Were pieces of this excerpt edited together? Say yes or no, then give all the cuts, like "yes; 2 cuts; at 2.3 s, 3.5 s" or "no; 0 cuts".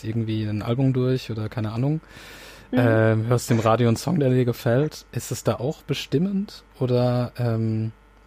no; 0 cuts